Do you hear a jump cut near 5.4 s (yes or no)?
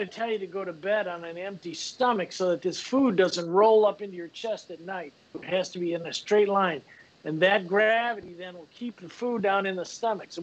yes